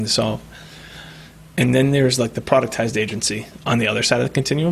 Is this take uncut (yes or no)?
yes